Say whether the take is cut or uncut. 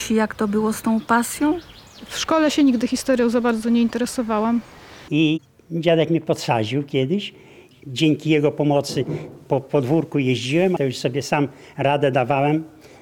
cut